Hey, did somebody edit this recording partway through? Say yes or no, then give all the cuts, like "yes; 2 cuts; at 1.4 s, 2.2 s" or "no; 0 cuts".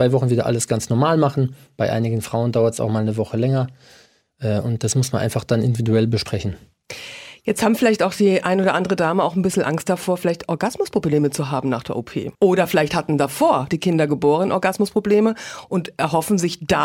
yes; 2 cuts; at 12.3 s, 13.7 s